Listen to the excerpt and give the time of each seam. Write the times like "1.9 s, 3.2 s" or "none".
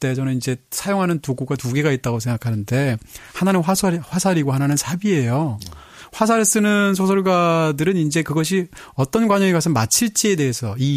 none